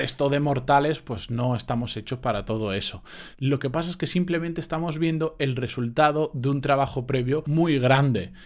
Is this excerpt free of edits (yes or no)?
no